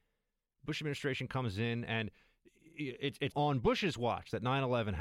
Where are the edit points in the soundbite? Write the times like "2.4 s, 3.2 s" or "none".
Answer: 3.3 s